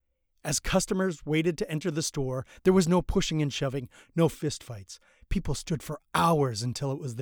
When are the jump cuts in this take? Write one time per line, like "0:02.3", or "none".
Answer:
none